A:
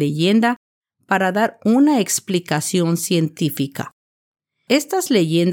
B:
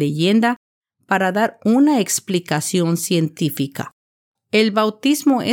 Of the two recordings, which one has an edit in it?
B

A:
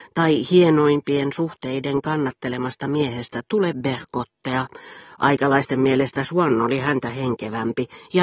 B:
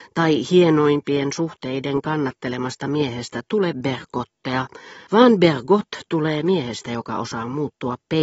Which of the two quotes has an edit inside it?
B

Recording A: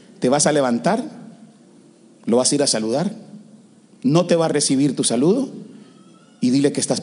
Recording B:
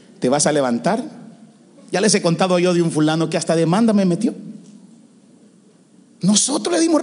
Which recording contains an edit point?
B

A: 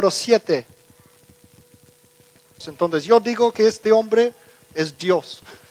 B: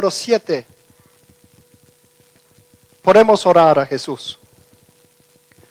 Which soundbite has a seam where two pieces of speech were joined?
A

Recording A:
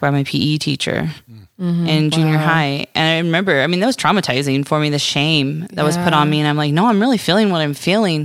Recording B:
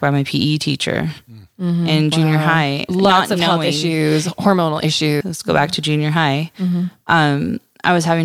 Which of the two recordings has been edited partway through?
B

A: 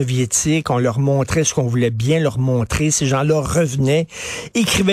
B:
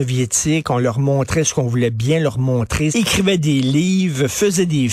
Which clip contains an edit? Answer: B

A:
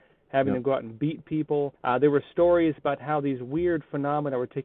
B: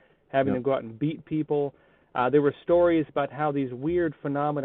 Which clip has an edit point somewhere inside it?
A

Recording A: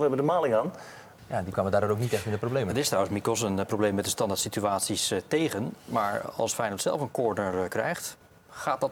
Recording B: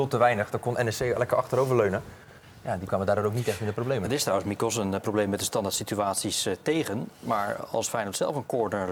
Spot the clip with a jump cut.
A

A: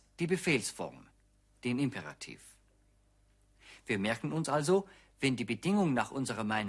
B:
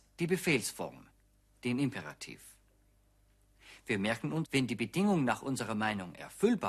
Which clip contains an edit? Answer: B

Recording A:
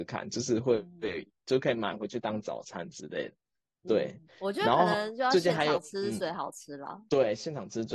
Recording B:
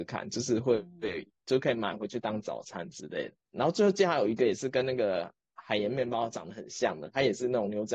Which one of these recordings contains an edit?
B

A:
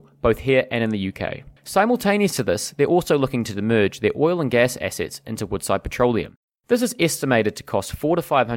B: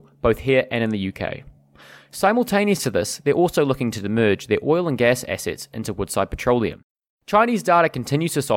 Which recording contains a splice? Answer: A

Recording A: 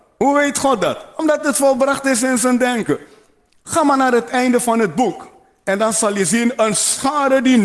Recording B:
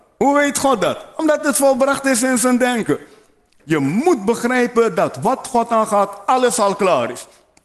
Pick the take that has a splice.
B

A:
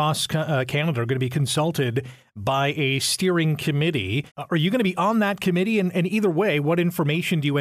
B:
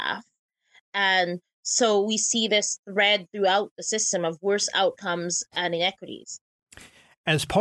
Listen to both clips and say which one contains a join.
A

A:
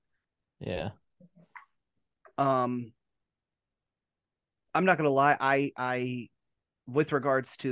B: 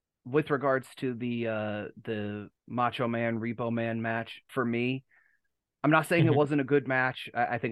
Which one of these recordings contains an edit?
B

